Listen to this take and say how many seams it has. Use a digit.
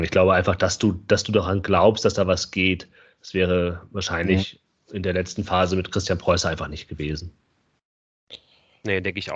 0